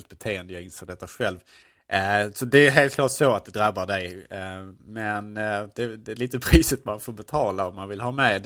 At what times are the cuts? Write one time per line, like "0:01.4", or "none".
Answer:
none